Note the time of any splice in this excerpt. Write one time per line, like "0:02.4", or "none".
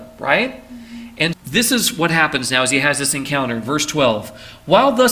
0:01.3